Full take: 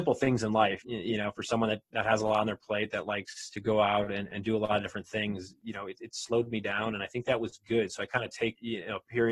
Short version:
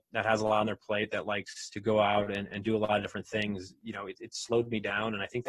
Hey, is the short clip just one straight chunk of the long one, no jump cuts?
yes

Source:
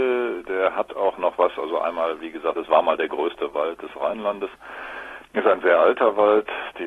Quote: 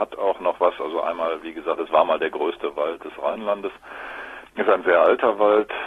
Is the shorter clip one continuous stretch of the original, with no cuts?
yes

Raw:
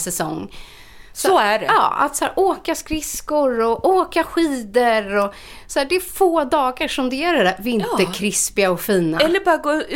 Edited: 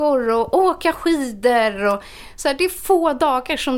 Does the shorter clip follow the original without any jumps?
yes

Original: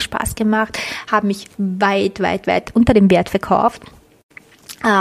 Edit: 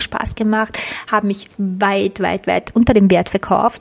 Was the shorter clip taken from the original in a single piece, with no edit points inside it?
yes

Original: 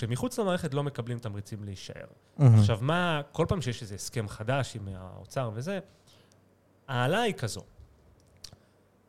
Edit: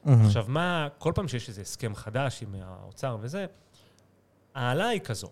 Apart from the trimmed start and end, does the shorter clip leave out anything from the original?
no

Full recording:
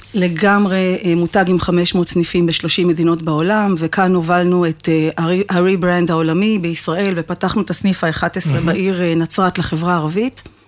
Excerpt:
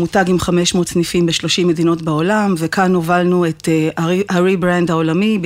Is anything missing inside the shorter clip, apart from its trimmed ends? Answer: no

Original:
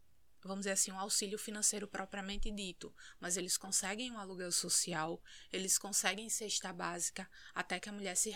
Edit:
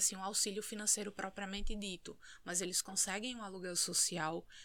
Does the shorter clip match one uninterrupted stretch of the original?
yes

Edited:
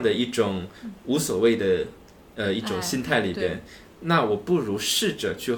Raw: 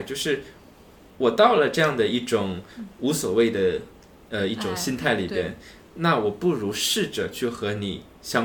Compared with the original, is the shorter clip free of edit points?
yes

